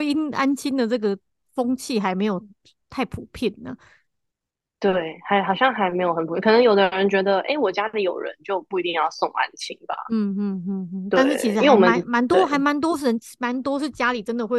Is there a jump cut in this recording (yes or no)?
no